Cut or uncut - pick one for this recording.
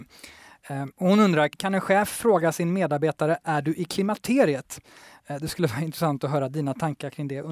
uncut